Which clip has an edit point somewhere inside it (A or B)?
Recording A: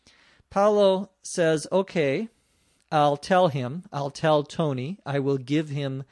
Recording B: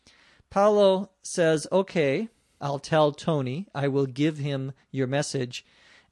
B